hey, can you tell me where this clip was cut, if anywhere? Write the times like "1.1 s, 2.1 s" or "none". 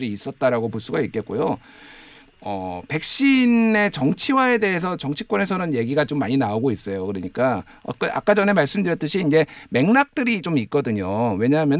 none